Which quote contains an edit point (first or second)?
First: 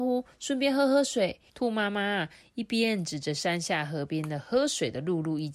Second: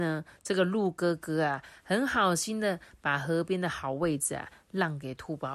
first